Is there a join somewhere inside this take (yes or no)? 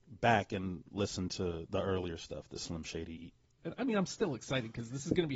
yes